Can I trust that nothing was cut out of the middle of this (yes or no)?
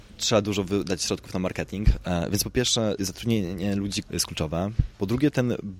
no